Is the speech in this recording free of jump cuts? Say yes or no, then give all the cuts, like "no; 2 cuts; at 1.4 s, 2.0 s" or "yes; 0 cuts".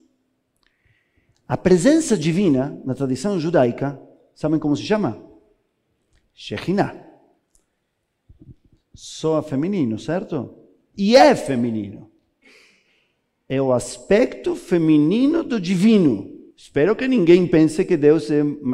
no; 1 cut; at 16.5 s